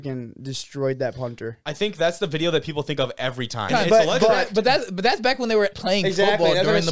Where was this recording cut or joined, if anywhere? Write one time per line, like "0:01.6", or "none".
0:03.7
0:05.7

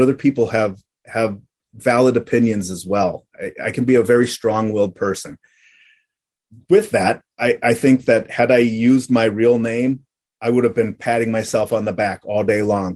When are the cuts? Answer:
0:07.3

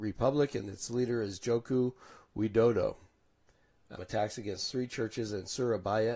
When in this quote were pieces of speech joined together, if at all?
0:04.0

